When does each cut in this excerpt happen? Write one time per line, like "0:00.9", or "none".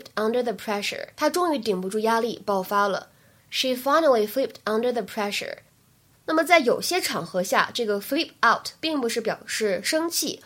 0:01.1